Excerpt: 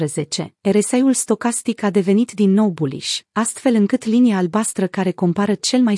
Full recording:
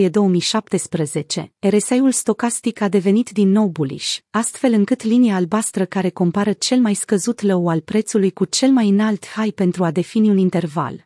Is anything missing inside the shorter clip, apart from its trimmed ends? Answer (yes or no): no